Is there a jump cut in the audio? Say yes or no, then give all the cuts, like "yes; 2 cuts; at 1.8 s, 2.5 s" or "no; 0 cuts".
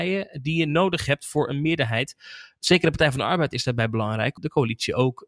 yes; 1 cut; at 4.4 s